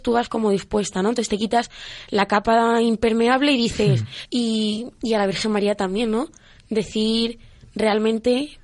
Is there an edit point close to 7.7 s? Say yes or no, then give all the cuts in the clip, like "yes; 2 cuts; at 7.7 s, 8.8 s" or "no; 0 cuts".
no; 1 cut; at 4.3 s